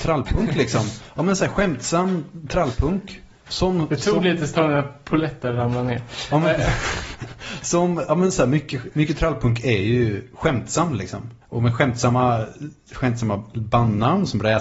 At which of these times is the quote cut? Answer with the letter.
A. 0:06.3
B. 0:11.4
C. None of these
B